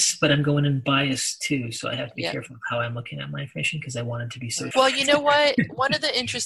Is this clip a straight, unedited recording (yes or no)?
no